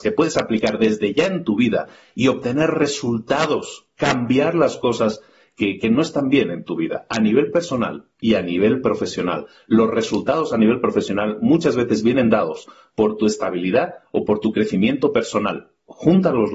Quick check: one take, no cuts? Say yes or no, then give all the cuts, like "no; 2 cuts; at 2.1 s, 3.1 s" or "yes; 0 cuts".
yes; 0 cuts